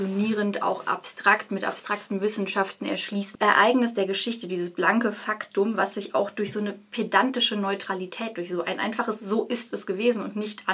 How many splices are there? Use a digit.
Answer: 1